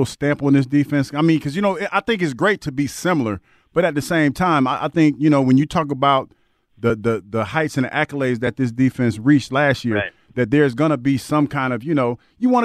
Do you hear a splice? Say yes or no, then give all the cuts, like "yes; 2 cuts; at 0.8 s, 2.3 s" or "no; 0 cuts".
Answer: no; 0 cuts